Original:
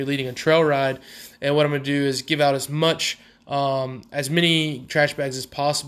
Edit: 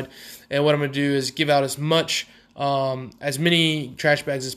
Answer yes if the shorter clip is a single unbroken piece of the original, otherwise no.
yes